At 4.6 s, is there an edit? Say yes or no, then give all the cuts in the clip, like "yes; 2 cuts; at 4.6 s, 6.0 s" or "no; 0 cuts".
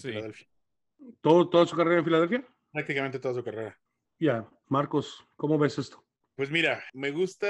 yes; 1 cut; at 4.6 s